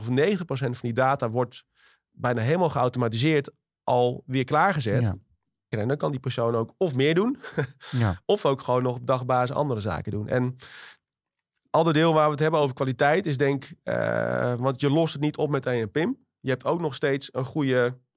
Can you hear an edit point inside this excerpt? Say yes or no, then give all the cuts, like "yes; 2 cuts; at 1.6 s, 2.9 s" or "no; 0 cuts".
yes; 1 cut; at 5.7 s